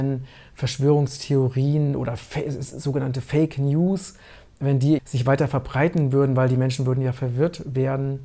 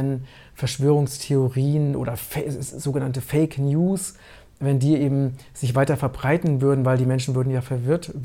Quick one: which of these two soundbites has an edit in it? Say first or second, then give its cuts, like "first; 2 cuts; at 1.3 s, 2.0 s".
first; 1 cut; at 5.0 s